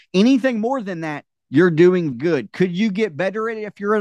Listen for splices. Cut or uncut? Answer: cut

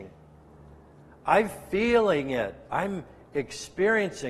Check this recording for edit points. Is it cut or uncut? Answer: uncut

